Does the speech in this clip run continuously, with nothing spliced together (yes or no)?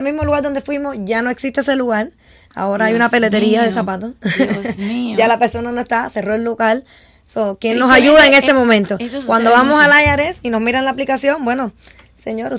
yes